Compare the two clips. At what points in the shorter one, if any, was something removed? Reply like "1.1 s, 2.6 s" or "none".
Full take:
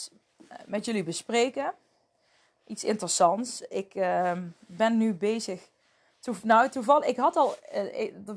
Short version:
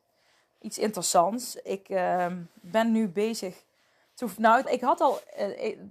4.6 s